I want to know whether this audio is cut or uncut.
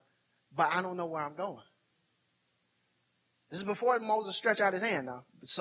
uncut